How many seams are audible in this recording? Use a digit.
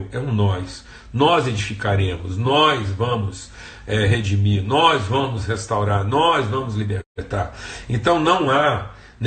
1